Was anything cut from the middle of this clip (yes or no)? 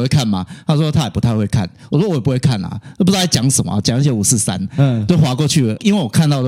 no